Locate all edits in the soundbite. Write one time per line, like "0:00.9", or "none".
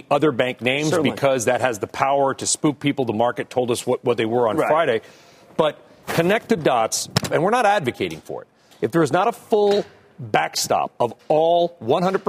0:07.3